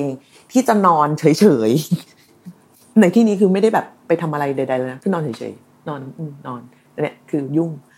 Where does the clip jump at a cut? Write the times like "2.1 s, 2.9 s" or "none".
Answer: none